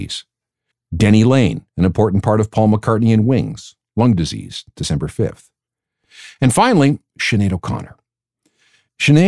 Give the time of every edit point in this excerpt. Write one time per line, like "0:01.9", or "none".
none

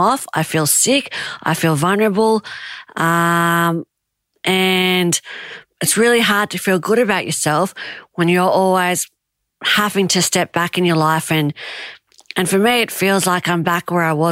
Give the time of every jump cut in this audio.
none

